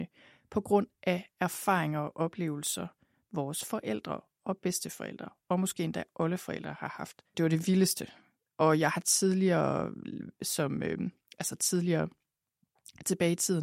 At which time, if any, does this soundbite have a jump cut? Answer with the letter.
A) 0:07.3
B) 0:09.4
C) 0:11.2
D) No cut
A